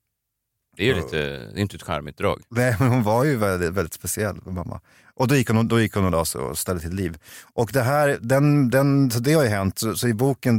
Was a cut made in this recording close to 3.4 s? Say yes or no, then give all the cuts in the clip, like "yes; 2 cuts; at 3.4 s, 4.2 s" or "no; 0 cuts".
no; 0 cuts